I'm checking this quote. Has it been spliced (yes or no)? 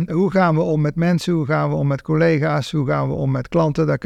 no